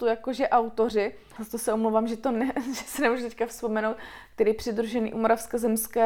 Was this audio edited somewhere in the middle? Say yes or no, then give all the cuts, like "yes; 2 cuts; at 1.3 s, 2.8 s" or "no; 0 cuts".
yes; 1 cut; at 1.4 s